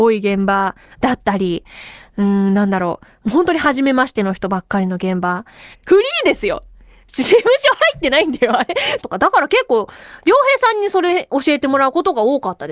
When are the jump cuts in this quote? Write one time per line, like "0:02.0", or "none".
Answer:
0:05.7
0:09.0